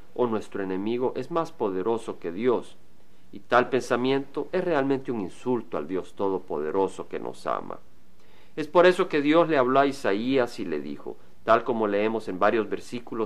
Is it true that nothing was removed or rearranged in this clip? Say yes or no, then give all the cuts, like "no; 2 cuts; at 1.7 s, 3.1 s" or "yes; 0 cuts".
yes; 0 cuts